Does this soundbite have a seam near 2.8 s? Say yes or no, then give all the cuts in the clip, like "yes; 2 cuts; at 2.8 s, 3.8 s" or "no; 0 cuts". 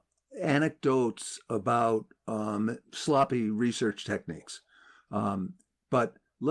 yes; 1 cut; at 2.8 s